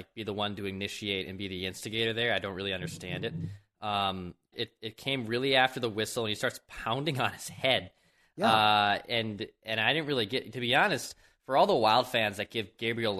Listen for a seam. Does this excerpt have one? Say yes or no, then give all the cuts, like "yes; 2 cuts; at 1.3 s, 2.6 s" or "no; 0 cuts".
yes; 1 cut; at 4.5 s